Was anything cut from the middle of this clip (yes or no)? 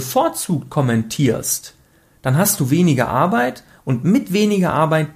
no